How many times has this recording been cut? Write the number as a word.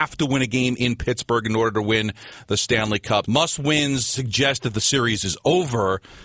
one